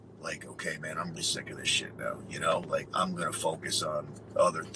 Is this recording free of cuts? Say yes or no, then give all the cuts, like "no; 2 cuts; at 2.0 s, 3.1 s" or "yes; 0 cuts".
no; 2 cuts; at 1.2 s, 2.9 s